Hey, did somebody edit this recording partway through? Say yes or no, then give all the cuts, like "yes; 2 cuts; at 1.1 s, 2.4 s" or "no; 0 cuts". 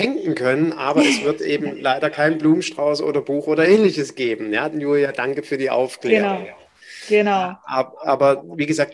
yes; 1 cut; at 4.7 s